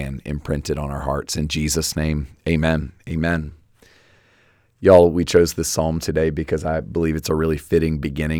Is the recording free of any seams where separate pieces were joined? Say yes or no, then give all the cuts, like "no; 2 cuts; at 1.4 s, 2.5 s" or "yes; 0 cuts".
yes; 0 cuts